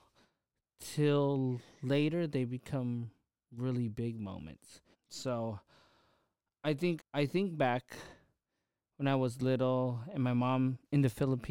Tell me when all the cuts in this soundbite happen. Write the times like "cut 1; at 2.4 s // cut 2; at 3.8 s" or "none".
cut 1; at 4.9 s // cut 2; at 7.0 s